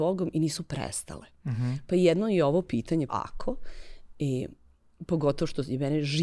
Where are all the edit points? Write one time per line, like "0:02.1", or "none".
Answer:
0:03.1